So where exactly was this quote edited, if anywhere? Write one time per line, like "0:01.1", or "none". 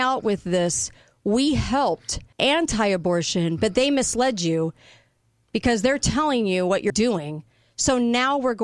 0:02.3
0:06.9